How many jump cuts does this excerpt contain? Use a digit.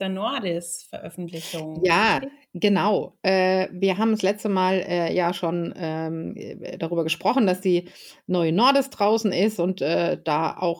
0